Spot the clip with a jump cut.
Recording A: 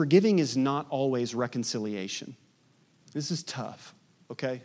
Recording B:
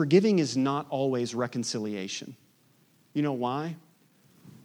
B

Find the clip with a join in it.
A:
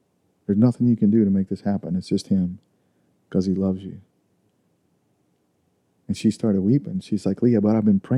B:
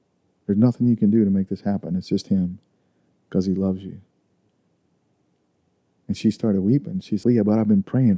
B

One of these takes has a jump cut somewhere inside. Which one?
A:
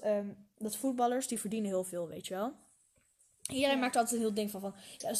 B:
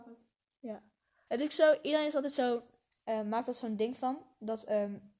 B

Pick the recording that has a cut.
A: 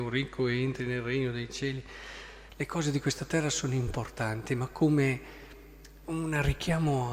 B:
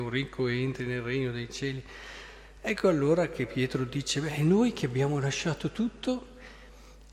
A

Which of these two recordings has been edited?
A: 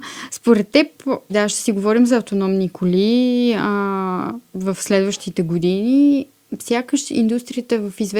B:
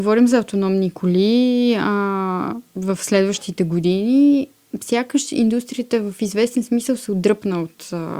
A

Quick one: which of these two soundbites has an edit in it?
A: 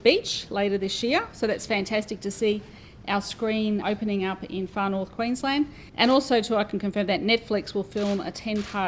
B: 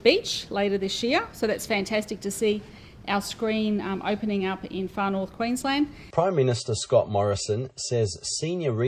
A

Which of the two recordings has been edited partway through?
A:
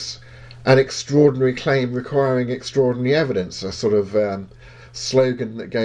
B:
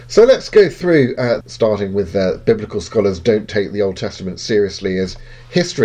B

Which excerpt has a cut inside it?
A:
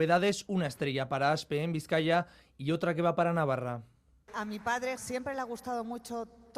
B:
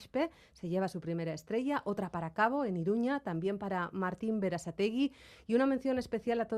A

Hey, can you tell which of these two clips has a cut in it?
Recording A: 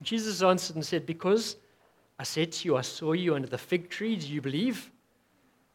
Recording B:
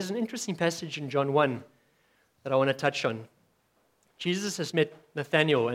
B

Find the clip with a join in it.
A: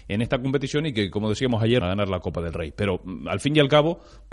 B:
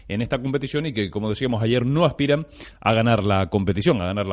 A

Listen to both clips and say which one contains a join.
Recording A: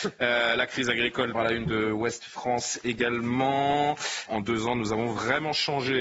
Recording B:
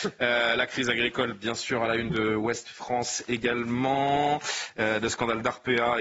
A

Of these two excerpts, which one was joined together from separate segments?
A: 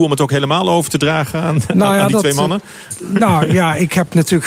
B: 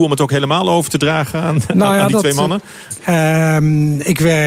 B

